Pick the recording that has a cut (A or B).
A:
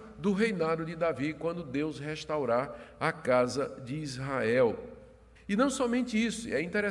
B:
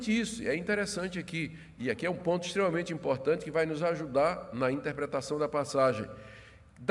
A